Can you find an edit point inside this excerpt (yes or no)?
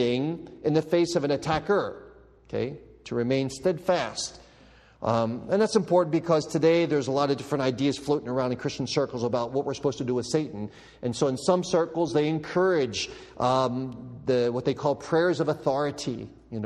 no